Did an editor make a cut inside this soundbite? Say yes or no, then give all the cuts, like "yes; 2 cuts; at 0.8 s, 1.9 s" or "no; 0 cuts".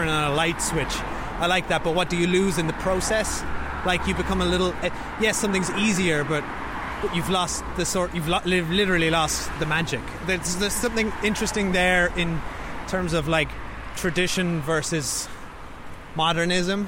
no; 0 cuts